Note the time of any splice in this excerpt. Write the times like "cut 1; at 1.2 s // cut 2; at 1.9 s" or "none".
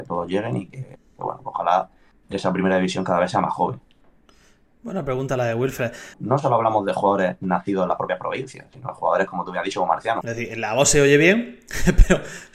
cut 1; at 6.1 s // cut 2; at 10.2 s